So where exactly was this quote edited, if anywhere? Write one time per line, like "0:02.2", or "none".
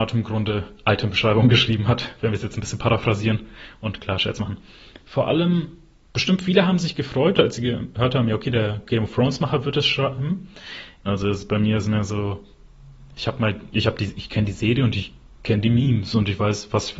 0:11.1